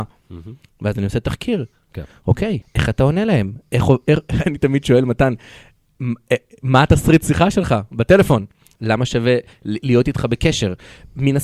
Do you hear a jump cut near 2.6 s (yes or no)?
yes